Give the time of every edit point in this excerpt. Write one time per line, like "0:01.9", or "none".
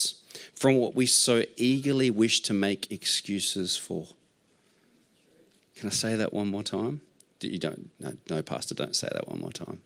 none